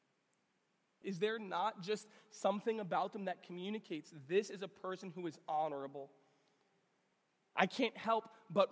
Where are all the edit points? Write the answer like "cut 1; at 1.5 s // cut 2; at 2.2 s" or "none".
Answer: cut 1; at 1.0 s